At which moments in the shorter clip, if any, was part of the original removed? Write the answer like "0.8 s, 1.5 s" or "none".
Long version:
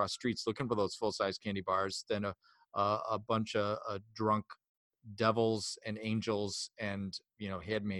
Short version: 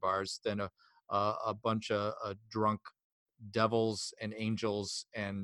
none